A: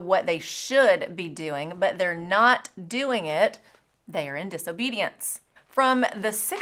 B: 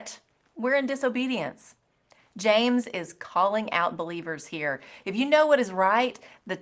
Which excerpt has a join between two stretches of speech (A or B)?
A